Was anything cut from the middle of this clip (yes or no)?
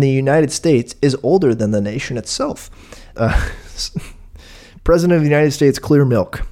yes